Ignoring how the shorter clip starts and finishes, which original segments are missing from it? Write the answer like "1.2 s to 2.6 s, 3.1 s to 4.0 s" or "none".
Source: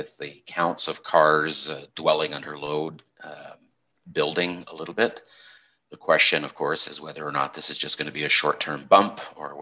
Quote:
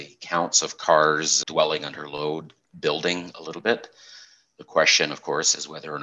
1.7 s to 1.9 s, 3.1 s to 4.0 s